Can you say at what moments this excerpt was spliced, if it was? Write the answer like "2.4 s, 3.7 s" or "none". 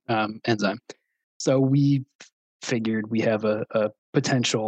none